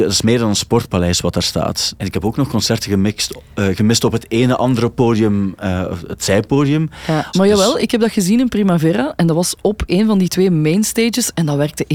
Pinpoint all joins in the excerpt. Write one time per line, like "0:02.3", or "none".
0:01.9
0:07.3